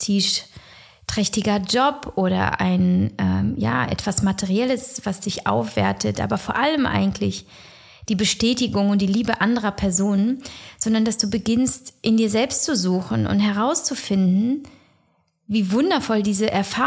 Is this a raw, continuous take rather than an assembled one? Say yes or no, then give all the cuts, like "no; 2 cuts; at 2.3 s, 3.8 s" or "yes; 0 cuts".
yes; 0 cuts